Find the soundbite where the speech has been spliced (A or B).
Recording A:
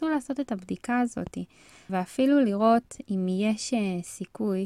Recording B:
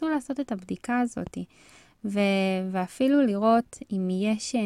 A